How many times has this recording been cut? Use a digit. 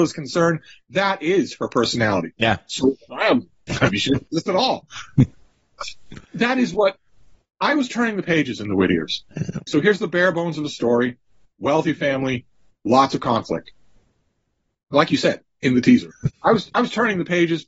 3